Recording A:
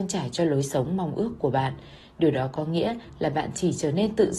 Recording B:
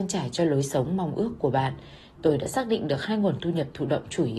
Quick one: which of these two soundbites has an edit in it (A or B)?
B